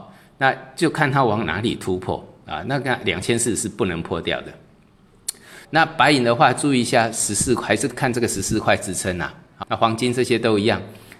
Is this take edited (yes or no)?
yes